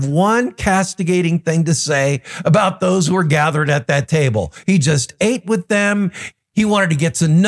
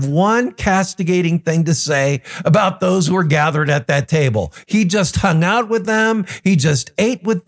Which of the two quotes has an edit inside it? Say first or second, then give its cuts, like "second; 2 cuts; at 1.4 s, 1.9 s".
first; 2 cuts; at 4.6 s, 6.3 s